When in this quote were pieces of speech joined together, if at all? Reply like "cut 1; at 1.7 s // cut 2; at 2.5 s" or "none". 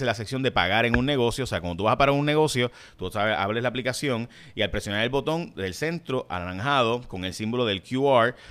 none